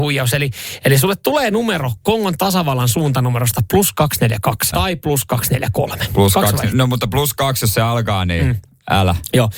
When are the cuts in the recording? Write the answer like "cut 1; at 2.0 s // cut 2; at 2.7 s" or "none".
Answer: cut 1; at 4.7 s

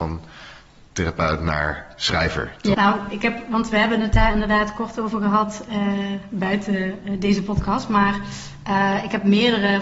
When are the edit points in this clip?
cut 1; at 2.7 s

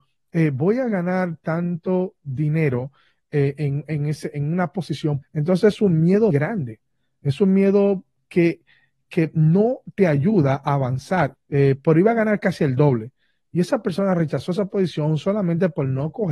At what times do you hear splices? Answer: cut 1; at 5.2 s // cut 2; at 6.3 s // cut 3; at 11.3 s

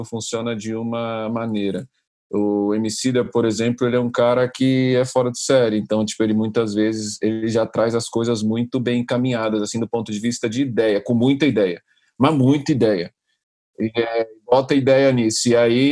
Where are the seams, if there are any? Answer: none

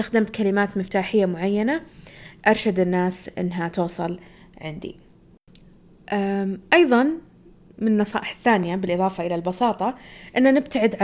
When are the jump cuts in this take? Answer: none

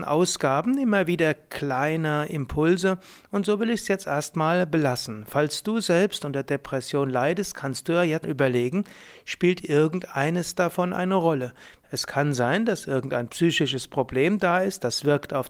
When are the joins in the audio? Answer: cut 1; at 8.2 s // cut 2; at 11.8 s

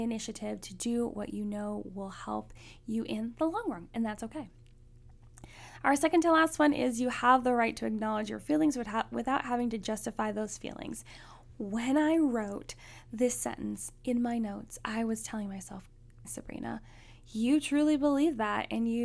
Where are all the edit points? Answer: cut 1; at 16.2 s

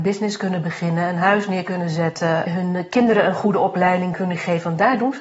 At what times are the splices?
cut 1; at 2.5 s

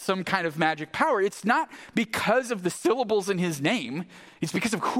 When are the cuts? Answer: none

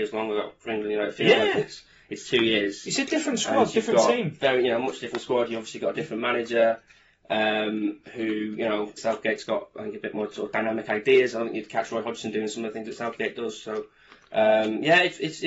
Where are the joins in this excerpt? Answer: cut 1; at 9.0 s

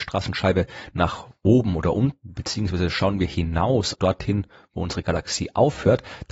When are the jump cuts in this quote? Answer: cut 1; at 3.9 s

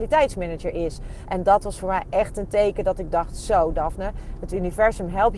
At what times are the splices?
cut 1; at 1.2 s

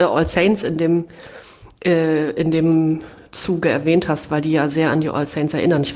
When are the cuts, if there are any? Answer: none

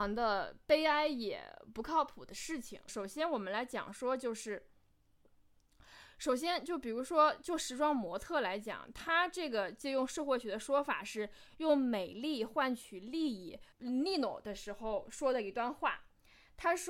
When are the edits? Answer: cut 1; at 2.9 s // cut 2; at 13.7 s

